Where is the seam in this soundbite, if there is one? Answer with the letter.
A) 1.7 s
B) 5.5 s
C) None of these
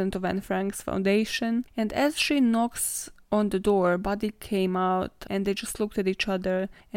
A